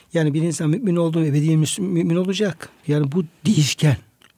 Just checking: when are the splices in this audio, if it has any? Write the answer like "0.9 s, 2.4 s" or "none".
2.8 s